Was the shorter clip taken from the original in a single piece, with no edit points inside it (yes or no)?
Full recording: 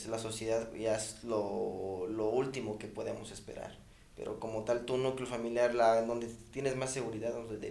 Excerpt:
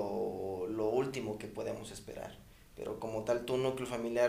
yes